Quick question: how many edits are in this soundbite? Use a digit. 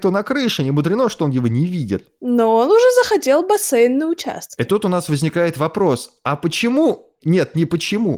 0